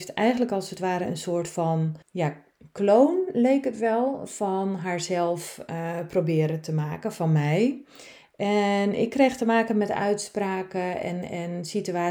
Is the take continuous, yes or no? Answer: no